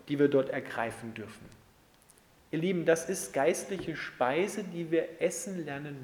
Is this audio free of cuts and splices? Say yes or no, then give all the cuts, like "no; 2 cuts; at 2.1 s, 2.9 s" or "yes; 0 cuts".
no; 1 cut; at 2.4 s